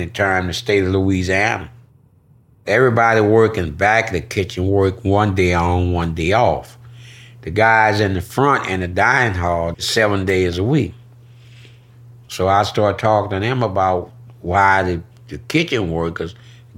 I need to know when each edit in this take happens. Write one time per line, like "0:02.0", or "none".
0:02.5
0:09.7